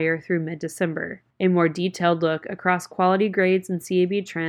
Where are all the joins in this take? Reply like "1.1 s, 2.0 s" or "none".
1.3 s